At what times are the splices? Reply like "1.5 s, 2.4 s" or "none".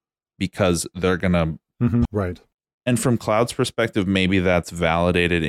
2.1 s